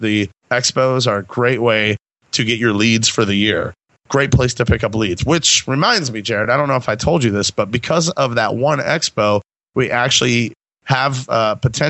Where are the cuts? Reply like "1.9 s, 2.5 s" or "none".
none